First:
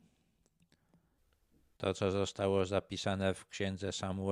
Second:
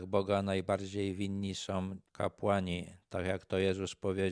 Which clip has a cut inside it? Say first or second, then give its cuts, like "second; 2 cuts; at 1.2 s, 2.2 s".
first; 1 cut; at 1.8 s